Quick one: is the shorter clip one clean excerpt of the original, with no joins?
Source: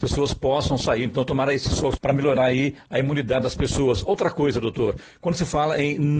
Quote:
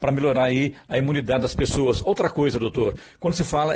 yes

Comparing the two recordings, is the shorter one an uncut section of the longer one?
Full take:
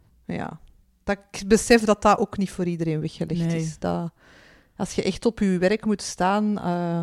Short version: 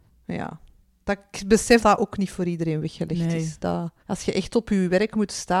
no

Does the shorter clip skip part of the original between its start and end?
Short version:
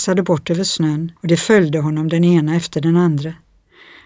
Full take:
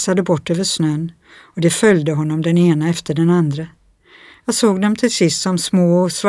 yes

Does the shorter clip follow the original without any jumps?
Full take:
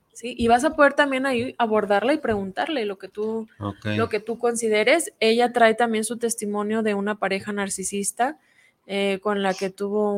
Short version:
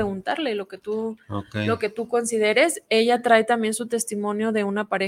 yes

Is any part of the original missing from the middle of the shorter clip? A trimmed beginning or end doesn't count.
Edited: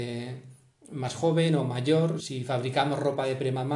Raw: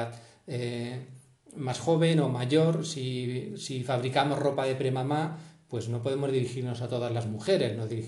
yes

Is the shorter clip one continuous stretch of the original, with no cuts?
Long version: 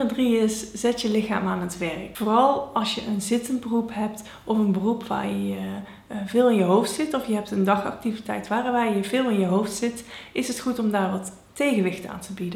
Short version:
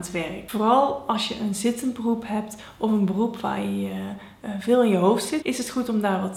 no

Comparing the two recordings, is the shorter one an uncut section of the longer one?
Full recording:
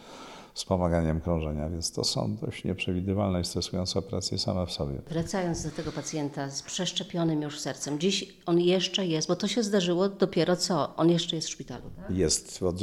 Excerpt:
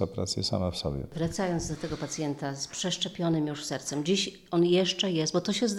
yes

